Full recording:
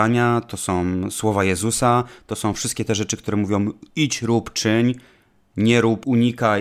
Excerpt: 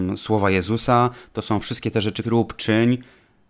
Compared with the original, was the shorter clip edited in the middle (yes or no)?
yes